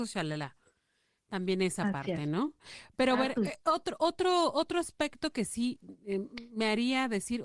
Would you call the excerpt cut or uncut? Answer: uncut